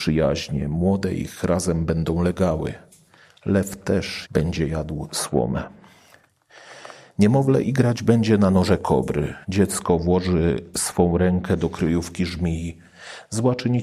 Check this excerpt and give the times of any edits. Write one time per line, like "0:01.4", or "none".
0:04.3
0:09.4